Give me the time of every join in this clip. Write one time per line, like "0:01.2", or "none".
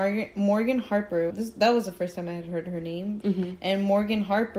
0:01.3
0:03.2